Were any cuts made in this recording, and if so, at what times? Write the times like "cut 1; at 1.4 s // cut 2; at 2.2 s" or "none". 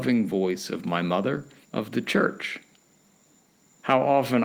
cut 1; at 1.6 s